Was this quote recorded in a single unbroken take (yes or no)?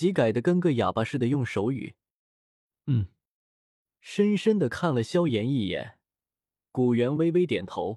yes